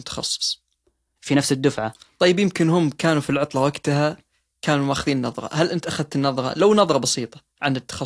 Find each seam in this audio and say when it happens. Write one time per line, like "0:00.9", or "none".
0:01.2

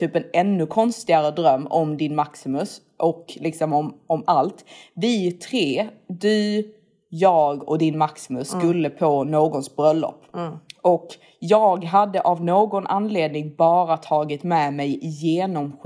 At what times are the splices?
none

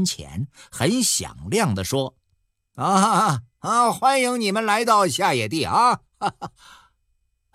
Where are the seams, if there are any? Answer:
none

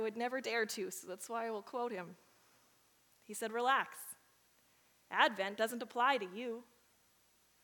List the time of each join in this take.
none

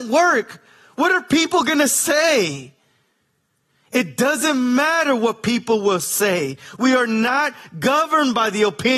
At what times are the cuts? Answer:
none

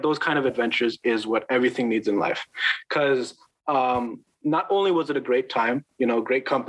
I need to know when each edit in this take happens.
none

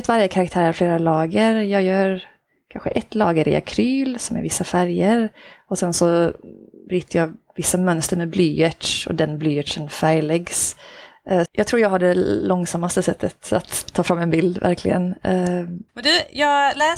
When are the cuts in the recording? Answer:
0:11.5
0:15.9

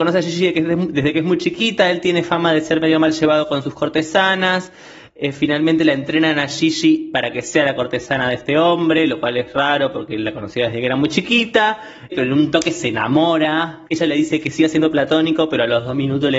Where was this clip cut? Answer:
0:12.1
0:13.9

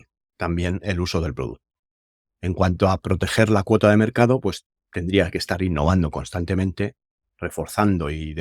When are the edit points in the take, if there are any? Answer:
none

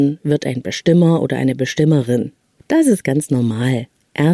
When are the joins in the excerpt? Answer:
0:02.6

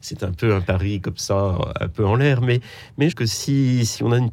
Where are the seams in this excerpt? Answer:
0:03.1

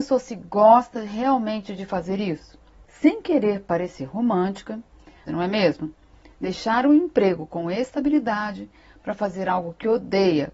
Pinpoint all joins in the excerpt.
0:05.3

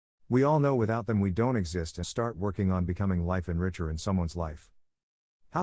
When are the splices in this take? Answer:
0:02.0

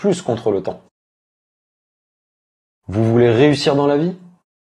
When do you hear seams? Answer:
none

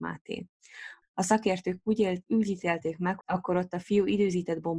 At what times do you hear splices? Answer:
0:01.0
0:03.2

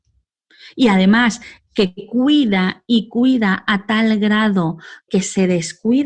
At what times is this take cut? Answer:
0:05.1

